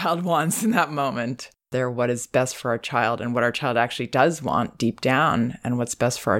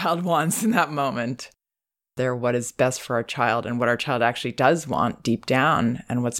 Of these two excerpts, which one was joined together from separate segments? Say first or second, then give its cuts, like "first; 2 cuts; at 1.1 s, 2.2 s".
first; 1 cut; at 1.6 s